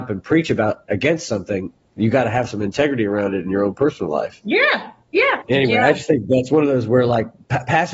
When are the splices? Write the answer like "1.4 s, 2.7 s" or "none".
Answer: 4.4 s, 5.4 s